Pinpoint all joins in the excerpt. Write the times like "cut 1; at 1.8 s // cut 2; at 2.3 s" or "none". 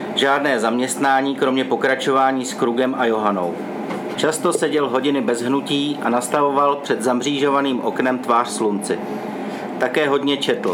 cut 1; at 4.2 s